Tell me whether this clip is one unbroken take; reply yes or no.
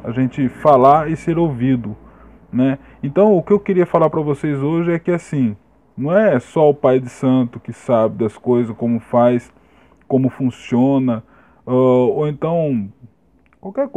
yes